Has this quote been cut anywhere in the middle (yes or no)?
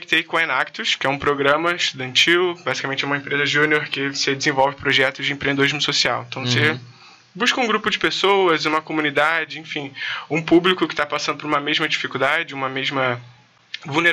no